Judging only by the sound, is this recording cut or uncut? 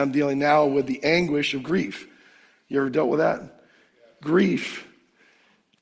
uncut